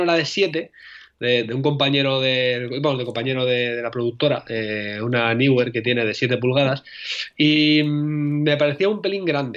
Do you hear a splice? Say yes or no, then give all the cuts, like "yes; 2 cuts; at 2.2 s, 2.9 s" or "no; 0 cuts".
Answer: no; 0 cuts